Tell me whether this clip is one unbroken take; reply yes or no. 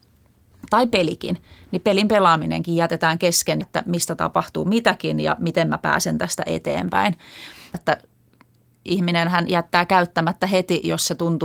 no